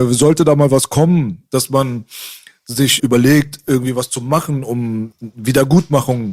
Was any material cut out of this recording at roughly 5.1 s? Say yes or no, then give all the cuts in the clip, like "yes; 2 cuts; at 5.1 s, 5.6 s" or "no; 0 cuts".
yes; 2 cuts; at 3.0 s, 5.1 s